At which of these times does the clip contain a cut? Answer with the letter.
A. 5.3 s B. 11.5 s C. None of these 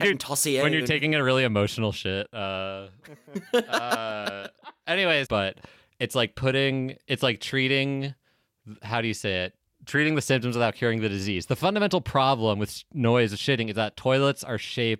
A